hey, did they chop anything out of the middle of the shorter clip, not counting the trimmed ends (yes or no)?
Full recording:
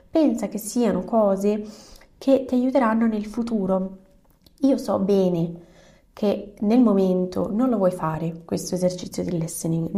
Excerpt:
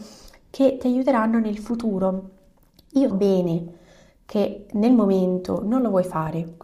yes